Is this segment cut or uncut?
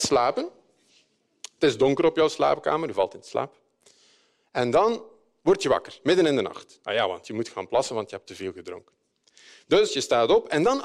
uncut